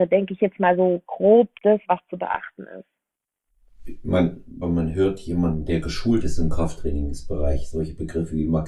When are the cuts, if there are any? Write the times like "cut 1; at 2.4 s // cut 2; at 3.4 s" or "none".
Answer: cut 1; at 1.8 s // cut 2; at 4.6 s